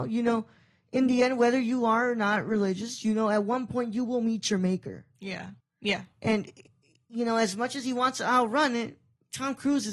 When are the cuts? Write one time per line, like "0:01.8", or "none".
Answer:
0:05.6